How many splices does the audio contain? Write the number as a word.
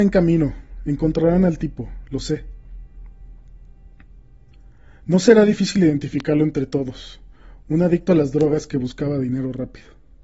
zero